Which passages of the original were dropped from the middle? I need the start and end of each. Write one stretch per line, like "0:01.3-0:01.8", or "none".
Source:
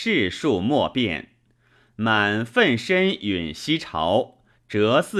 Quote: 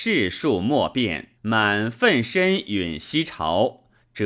0:01.4-0:01.9